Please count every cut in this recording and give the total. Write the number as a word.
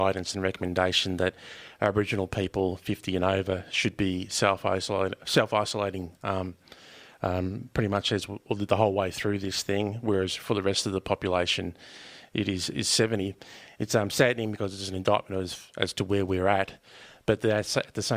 zero